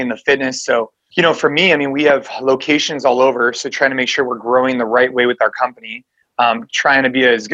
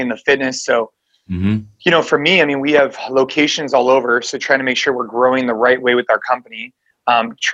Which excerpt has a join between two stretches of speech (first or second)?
first